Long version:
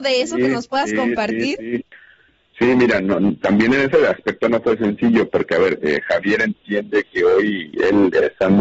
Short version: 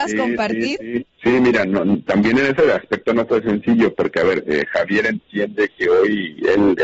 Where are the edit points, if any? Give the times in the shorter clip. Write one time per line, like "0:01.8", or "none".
0:01.1